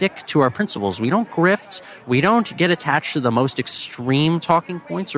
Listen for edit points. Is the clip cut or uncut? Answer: uncut